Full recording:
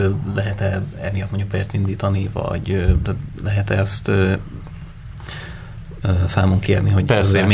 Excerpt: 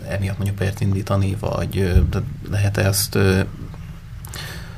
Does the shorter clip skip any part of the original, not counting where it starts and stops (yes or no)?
no